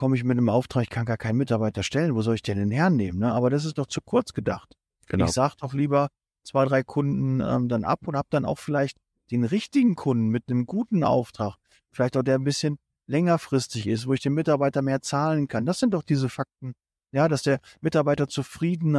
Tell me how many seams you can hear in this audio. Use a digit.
0